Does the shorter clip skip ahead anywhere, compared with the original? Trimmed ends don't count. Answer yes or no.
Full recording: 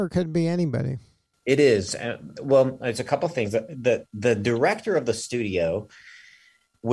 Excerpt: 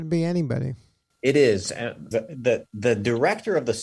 yes